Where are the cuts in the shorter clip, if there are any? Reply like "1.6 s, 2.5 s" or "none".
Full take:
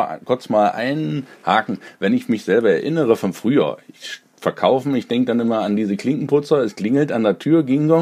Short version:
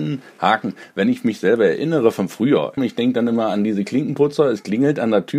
2.8 s